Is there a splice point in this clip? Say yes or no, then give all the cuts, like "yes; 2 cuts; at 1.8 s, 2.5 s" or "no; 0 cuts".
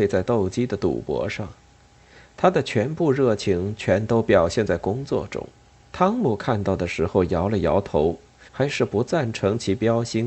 yes; 2 cuts; at 5.8 s, 8.5 s